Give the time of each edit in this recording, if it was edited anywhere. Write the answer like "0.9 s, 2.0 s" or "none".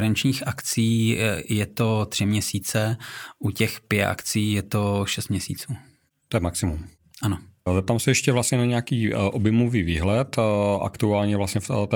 none